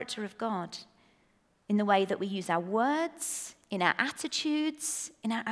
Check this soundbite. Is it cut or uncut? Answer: uncut